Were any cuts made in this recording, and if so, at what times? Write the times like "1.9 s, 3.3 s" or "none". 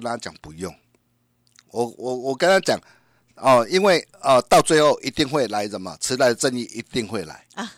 none